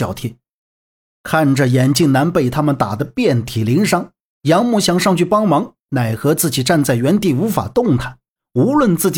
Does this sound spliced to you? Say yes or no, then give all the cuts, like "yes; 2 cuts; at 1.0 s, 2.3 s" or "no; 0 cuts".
no; 0 cuts